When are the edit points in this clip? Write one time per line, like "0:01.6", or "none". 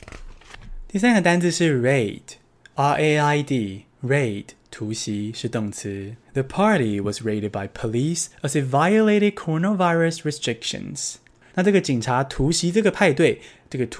0:06.2
0:11.5